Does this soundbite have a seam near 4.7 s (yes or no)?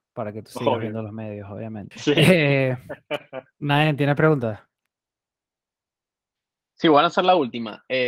no